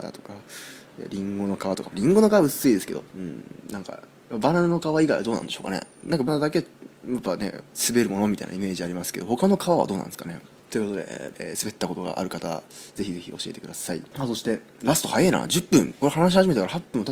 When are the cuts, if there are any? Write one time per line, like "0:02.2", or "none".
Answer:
0:06.3
0:11.3